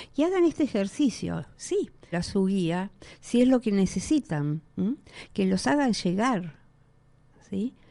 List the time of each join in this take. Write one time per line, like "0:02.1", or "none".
0:02.1
0:04.7